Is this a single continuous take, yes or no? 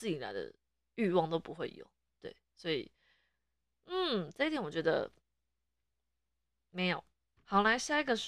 no